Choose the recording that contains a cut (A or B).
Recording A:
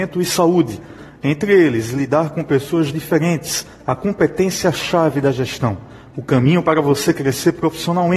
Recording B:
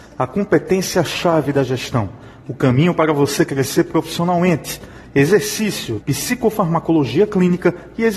B